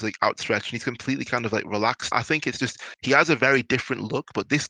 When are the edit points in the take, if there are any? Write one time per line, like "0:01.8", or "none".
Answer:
0:02.1

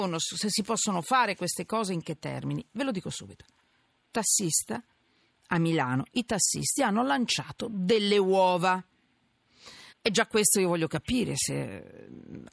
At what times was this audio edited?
0:09.9

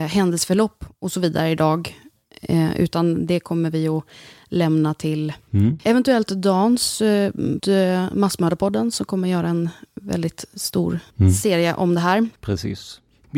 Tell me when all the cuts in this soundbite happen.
0:07.6

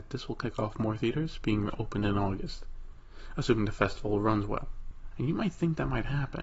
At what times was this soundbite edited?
0:05.1

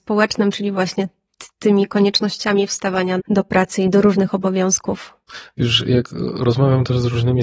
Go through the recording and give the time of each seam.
0:03.2

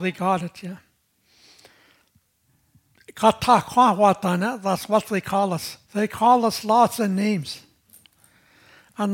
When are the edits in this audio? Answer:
0:05.8

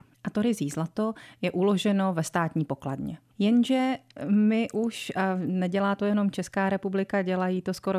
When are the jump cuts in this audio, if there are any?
0:03.3

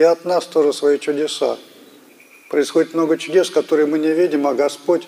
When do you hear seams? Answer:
none

